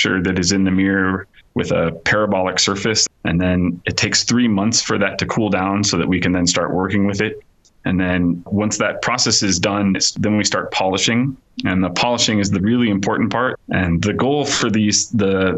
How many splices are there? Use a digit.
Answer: 3